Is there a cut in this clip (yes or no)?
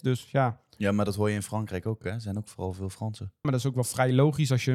no